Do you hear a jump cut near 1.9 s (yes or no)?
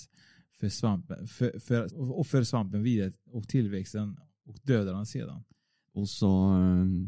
yes